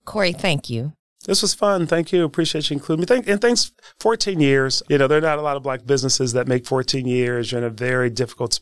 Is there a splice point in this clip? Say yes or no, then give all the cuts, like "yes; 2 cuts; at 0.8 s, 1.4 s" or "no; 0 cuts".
yes; 1 cut; at 4.8 s